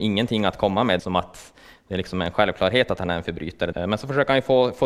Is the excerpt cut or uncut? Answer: cut